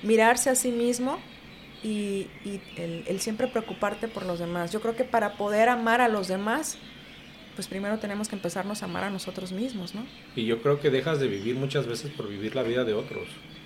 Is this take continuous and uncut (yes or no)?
no